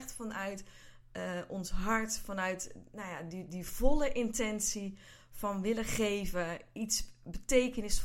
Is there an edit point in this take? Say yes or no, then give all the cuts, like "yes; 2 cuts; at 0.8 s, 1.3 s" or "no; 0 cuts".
no; 0 cuts